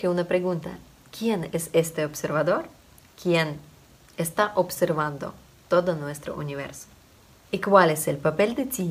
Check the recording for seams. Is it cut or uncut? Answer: uncut